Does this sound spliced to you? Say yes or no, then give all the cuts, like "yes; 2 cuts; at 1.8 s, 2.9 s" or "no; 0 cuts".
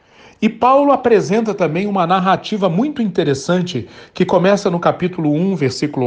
no; 0 cuts